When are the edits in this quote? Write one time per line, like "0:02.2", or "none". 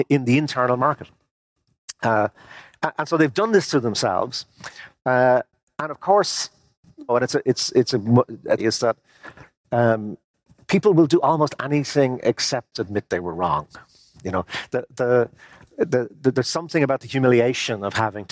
0:07.1
0:08.6